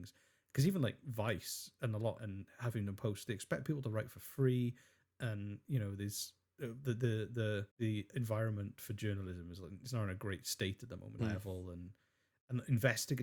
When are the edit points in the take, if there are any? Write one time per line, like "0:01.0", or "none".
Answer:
0:02.2
0:07.7
0:11.2